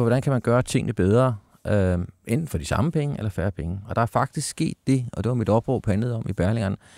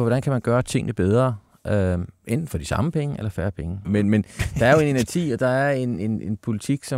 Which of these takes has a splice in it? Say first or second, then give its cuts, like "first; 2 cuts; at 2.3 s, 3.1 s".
second; 1 cut; at 3.8 s